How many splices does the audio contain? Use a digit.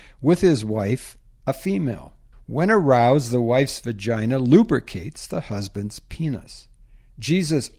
1